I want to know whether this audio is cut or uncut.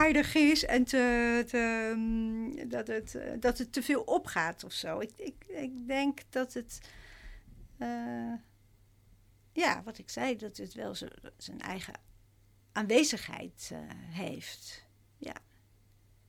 uncut